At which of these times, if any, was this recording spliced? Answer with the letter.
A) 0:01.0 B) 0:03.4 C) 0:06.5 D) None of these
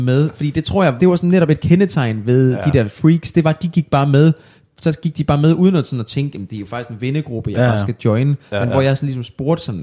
A